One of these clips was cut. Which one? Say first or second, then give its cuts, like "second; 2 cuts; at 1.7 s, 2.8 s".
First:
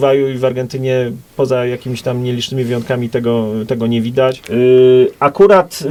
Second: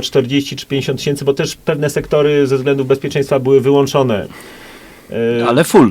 first; 1 cut; at 4.4 s